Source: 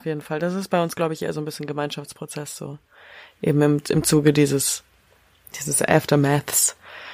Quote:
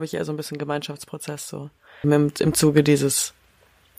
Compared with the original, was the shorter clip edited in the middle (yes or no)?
yes